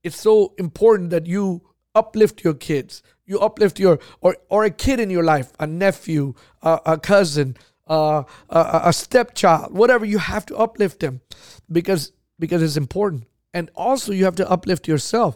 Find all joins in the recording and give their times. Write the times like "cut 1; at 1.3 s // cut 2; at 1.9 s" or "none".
none